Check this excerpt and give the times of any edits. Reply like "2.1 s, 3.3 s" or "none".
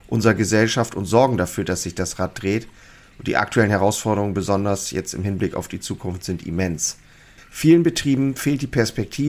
7.4 s